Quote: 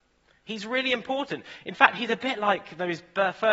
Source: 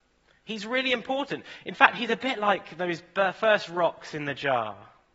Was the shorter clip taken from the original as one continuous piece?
yes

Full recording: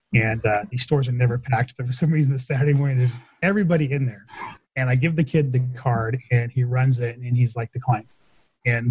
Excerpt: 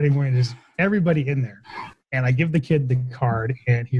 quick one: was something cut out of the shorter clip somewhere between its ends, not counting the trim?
no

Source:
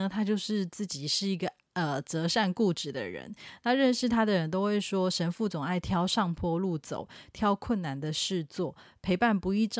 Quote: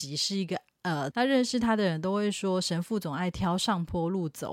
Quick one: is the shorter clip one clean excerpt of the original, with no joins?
no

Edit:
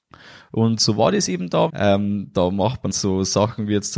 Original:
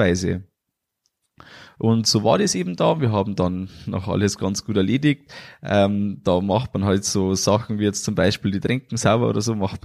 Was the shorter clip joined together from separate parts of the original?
yes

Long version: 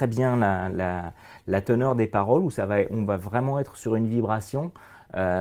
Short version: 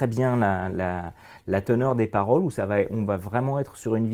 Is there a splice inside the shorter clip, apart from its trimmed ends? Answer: no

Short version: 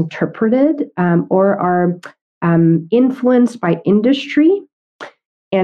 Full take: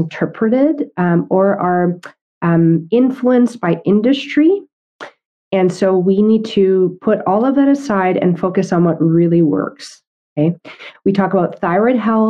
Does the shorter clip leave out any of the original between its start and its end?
no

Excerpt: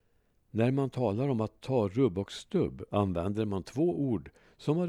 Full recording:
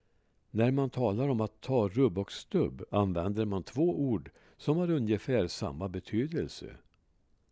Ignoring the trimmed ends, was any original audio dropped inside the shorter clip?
no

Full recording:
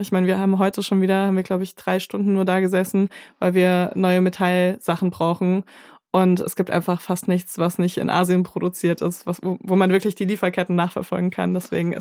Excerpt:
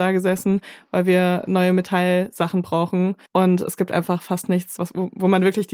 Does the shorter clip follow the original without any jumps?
no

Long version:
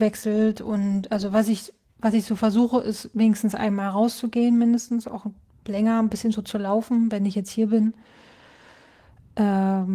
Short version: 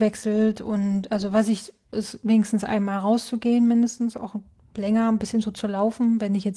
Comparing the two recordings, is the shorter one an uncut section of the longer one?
no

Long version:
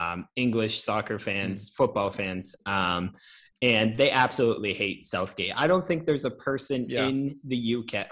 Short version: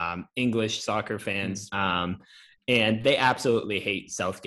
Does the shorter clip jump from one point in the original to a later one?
yes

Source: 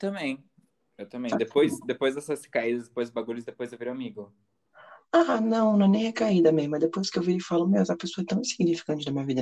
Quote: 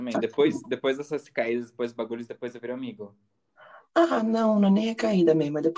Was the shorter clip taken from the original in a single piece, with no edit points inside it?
yes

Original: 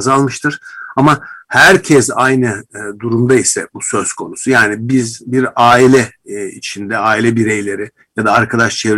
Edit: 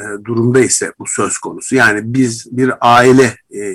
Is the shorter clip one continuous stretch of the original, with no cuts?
yes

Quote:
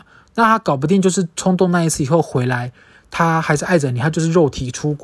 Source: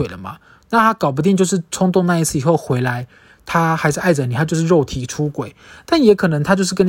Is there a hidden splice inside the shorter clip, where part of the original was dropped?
no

